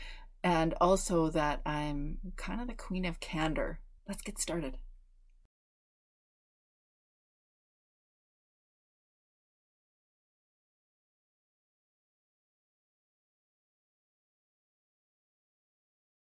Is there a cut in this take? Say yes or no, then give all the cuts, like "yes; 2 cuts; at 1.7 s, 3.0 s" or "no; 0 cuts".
yes; 1 cut; at 4.0 s